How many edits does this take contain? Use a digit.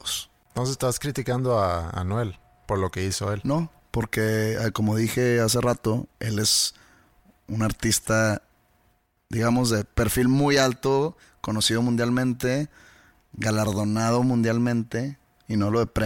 0